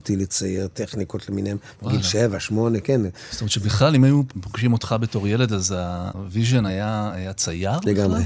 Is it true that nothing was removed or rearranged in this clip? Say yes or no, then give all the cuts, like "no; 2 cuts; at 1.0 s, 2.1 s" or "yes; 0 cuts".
yes; 0 cuts